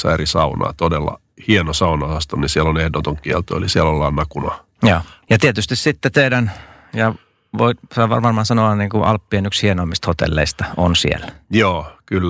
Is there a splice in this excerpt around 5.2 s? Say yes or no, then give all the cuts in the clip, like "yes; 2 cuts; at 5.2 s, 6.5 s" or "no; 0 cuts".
yes; 1 cut; at 5.2 s